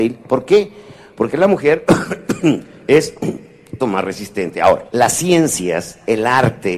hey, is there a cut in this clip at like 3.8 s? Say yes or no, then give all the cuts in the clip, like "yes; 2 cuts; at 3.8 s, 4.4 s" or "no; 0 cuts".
yes; 2 cuts; at 3.8 s, 4.9 s